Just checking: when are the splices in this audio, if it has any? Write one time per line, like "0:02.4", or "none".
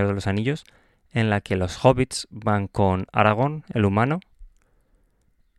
none